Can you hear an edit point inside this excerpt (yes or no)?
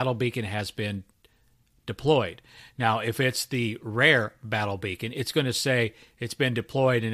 no